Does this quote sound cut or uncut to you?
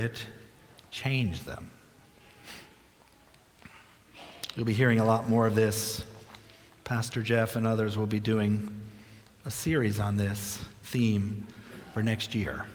uncut